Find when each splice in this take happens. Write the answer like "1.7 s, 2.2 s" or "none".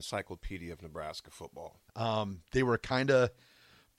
1.9 s